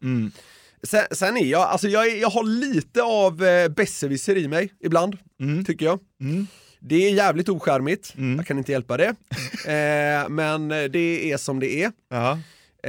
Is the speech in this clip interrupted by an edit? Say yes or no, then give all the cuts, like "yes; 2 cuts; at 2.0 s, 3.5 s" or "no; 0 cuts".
no; 0 cuts